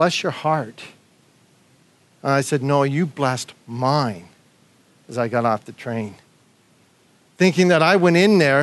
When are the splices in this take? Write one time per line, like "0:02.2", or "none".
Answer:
none